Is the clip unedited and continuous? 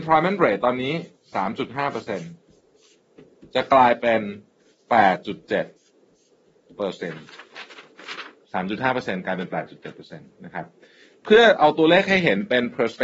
no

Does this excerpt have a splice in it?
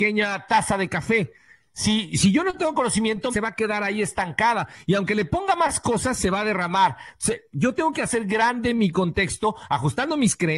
yes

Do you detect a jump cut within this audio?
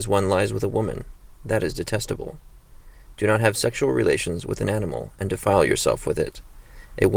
no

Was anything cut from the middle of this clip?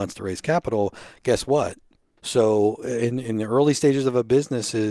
yes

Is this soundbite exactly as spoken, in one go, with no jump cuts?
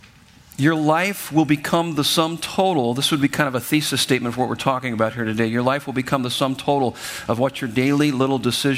yes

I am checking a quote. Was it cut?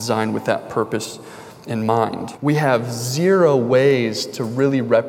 yes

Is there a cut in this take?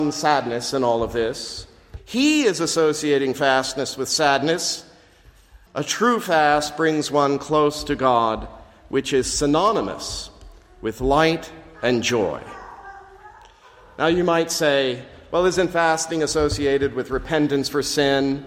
yes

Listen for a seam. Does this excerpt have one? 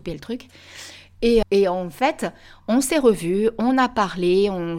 yes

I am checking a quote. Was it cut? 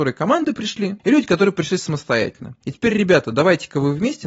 yes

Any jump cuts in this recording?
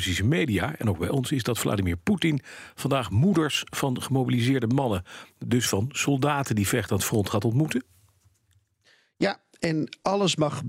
no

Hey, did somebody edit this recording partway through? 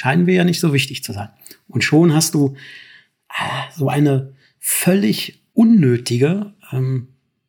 no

